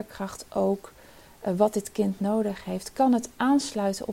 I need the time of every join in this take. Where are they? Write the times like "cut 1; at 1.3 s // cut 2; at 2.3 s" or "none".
none

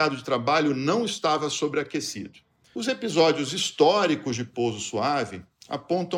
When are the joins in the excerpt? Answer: cut 1; at 2.6 s

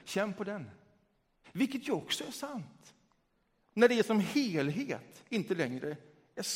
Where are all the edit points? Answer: cut 1; at 1.4 s // cut 2; at 3.6 s

